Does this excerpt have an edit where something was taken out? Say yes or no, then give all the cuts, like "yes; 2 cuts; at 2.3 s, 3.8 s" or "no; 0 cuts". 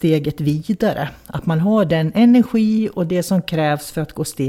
no; 0 cuts